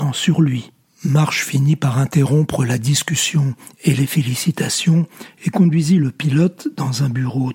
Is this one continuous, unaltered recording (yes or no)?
yes